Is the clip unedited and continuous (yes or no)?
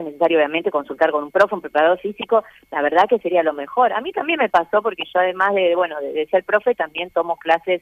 yes